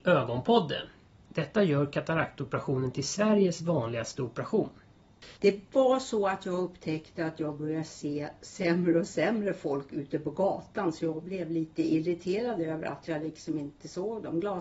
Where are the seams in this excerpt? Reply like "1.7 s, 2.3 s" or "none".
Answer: 1.2 s, 5.3 s